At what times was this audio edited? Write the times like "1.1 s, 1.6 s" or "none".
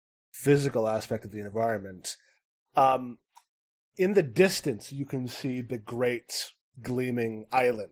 none